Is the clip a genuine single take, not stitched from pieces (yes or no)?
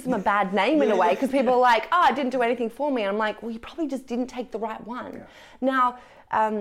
yes